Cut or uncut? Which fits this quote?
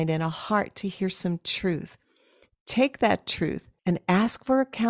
cut